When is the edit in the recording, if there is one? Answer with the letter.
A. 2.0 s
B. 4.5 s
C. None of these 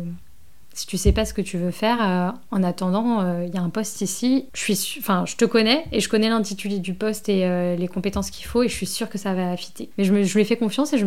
C